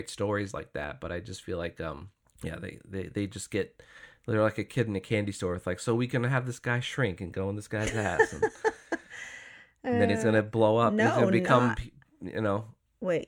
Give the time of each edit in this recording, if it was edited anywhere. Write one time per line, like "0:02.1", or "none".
none